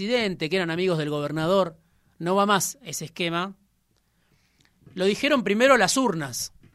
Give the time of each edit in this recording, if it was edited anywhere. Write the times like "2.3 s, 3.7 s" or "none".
none